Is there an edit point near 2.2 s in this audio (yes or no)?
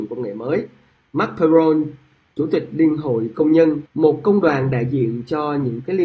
no